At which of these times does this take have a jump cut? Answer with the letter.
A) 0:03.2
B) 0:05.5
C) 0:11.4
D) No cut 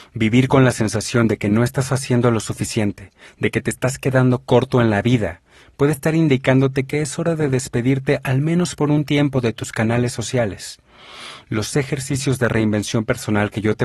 C